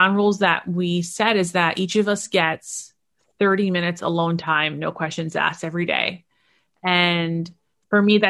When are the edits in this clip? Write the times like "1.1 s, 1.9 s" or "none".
none

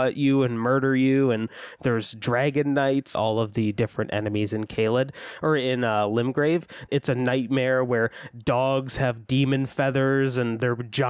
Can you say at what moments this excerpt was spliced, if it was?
3.1 s, 6.9 s

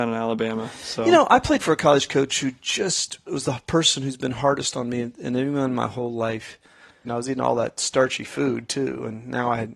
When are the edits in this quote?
7.0 s

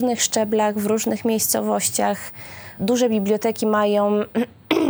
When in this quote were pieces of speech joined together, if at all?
2.8 s

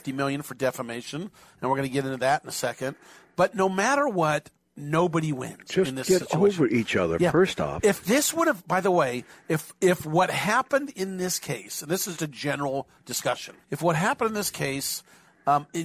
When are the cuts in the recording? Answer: 12.2 s, 13.6 s

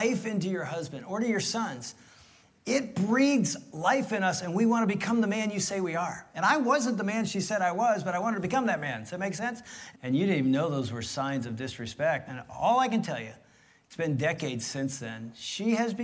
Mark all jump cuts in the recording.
9.9 s, 12.3 s

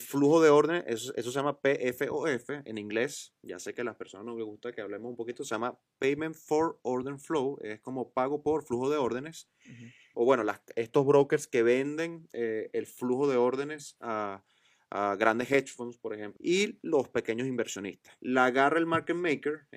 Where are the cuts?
10.1 s, 16.4 s, 18.2 s

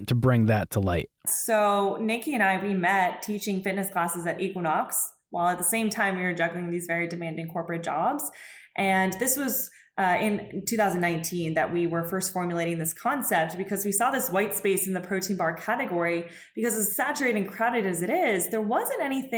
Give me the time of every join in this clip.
1.3 s

